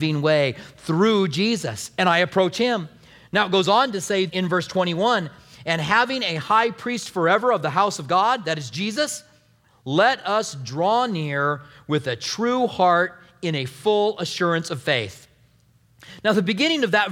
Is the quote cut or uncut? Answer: cut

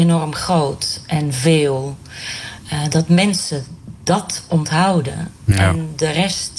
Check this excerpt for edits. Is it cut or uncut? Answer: uncut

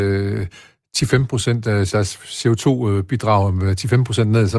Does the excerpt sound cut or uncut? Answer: cut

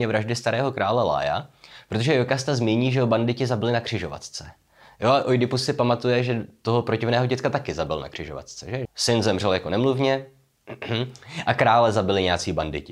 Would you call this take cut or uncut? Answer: cut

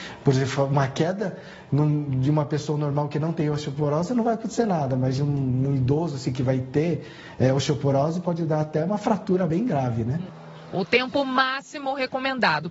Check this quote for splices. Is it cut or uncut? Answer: uncut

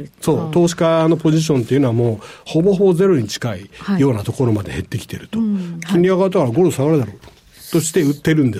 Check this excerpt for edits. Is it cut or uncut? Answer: cut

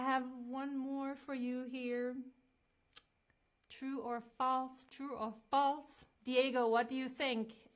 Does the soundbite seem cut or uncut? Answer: cut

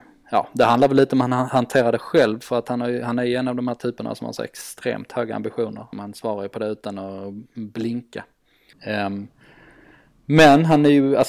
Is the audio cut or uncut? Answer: cut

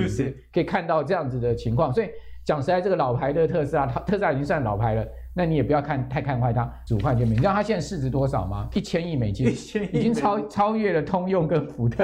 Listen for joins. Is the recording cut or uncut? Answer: cut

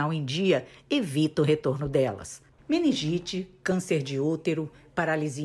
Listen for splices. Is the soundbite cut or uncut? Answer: cut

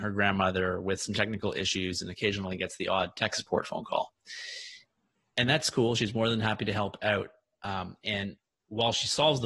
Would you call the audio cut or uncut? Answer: uncut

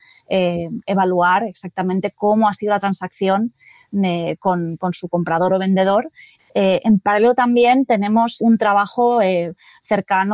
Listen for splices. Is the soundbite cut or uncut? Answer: cut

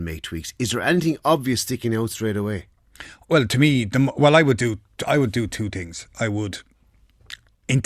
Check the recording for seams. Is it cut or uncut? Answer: uncut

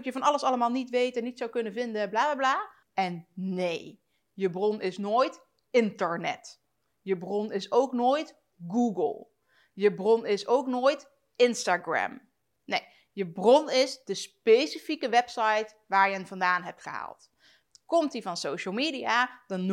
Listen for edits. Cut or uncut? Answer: cut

